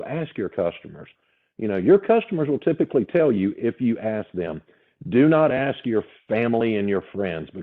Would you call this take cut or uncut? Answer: uncut